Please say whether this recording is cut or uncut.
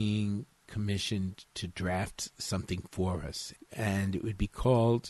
cut